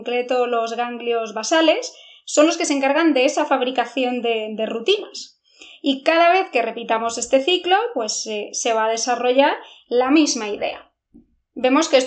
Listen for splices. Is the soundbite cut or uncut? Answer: uncut